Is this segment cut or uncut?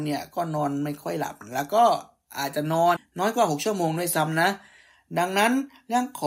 cut